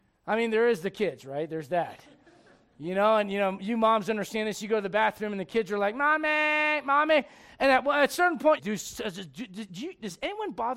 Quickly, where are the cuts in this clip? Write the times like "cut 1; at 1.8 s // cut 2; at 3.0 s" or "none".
cut 1; at 8.6 s